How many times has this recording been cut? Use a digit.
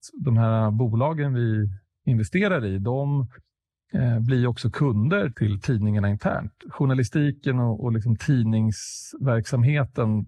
1